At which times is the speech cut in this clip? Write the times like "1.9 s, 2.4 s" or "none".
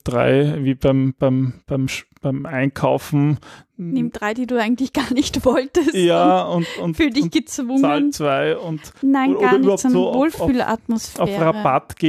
none